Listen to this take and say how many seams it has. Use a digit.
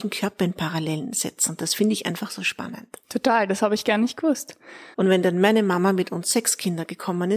2